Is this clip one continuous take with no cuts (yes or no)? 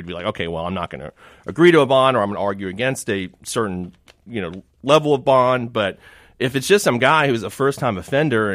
yes